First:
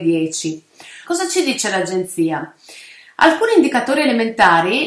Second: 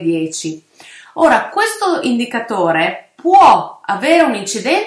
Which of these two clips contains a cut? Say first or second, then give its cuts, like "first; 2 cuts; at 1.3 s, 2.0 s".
first; 1 cut; at 1.0 s